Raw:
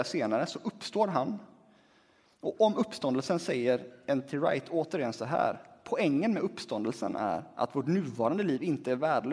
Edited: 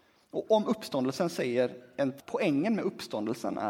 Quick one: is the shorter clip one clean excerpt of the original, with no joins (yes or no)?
no